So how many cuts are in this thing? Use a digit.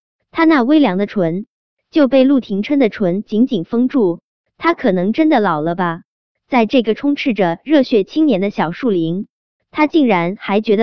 1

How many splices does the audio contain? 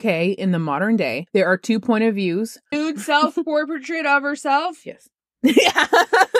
1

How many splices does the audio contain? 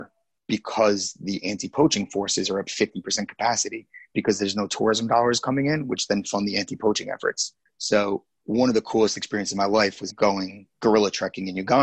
2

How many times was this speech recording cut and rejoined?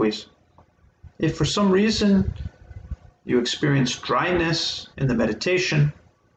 2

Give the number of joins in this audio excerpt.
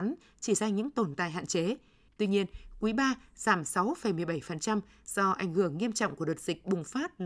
1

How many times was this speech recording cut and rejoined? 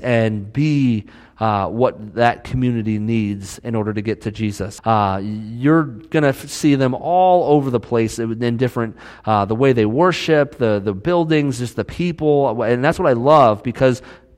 1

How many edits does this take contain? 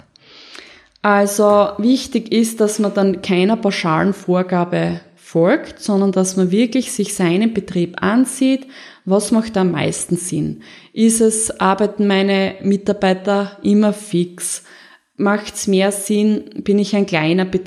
0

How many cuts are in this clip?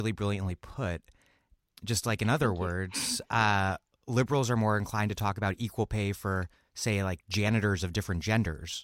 0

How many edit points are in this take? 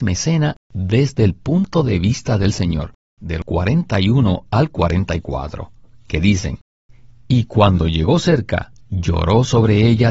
2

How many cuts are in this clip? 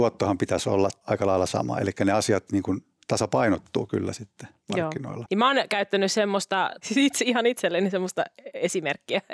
1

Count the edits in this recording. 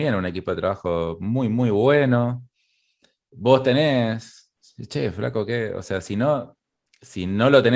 0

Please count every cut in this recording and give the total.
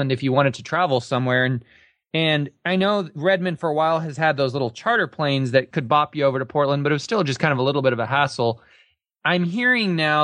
0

